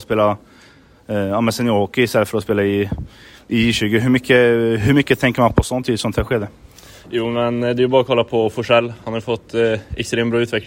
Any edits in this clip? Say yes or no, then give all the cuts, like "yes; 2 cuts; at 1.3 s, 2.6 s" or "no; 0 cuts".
no; 0 cuts